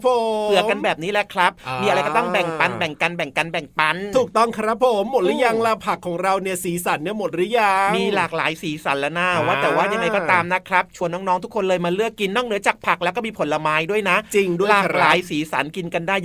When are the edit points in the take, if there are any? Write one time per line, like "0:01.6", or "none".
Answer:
none